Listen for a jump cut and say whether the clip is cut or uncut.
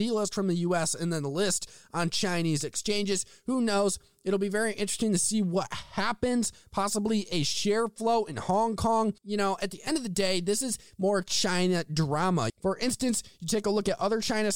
cut